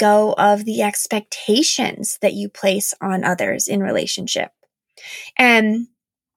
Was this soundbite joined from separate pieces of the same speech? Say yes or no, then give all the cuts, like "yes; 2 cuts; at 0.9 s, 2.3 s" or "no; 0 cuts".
yes; 1 cut; at 5.3 s